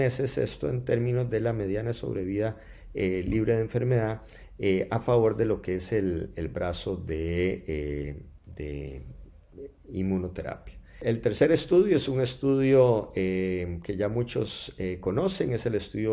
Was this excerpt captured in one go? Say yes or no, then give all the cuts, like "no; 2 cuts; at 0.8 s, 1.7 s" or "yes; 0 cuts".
yes; 0 cuts